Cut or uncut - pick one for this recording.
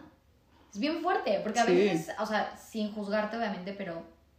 uncut